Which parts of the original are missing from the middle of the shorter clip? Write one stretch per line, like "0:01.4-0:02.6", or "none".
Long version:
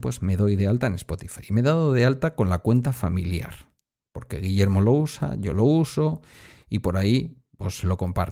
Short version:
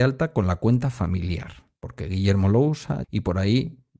0:03.8-0:04.1
0:05.4-0:06.6